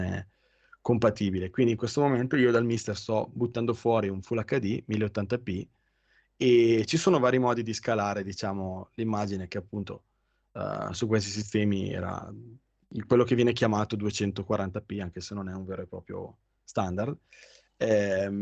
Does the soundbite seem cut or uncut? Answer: uncut